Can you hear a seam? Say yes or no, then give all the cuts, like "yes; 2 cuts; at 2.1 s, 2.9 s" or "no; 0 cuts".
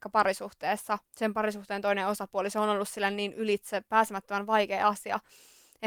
yes; 1 cut; at 1.1 s